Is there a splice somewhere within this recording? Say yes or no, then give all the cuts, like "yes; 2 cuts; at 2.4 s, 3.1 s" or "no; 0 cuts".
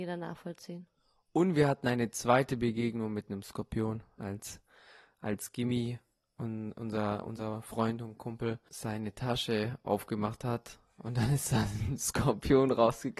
no; 0 cuts